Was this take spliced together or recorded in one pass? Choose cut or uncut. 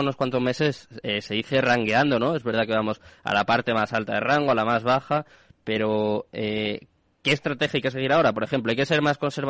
uncut